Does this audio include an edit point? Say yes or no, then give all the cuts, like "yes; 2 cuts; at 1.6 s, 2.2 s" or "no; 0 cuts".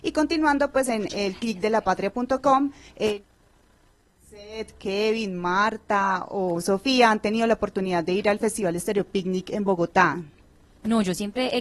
no; 0 cuts